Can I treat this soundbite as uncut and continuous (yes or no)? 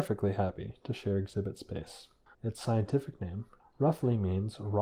no